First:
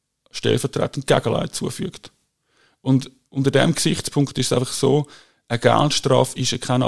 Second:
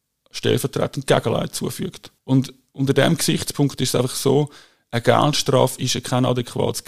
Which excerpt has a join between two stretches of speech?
second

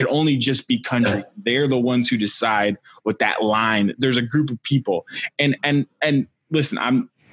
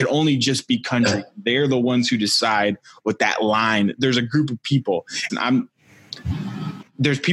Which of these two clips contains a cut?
second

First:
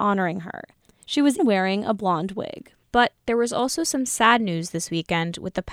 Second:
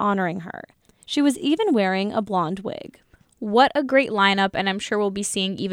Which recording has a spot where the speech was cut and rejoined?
first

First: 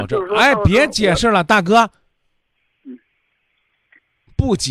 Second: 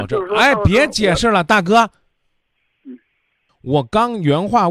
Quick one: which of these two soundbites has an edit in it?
second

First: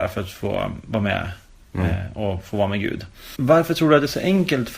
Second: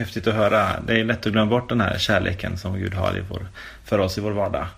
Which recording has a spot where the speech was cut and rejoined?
first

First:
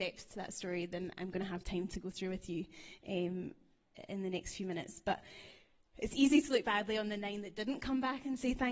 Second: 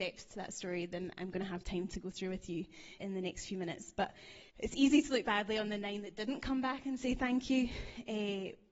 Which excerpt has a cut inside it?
second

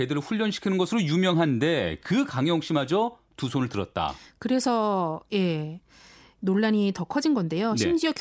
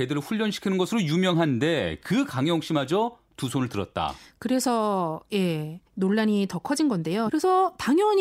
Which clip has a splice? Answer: second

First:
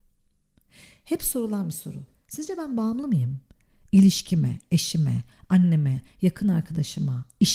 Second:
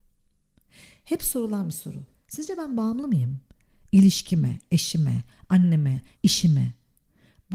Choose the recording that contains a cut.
second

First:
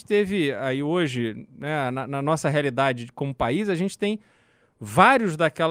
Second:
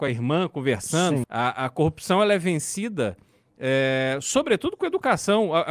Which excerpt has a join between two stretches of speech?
second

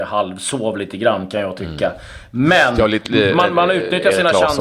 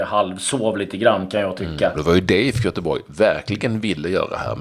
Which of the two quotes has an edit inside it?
second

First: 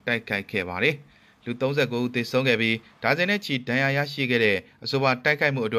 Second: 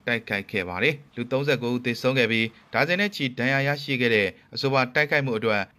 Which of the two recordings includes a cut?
second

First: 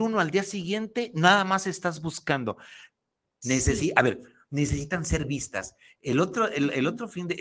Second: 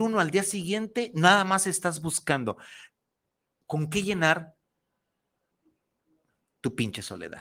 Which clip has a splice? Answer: first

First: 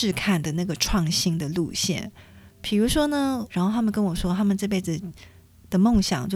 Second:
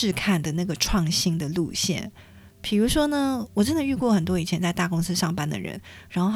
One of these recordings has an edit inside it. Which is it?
first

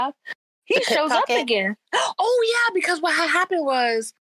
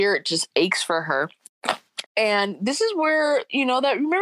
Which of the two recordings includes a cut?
second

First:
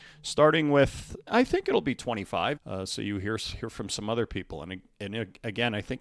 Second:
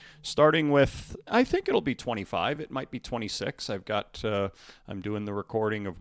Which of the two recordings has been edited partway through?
first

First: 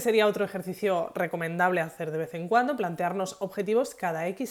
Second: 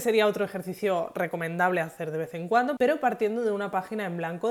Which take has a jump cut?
second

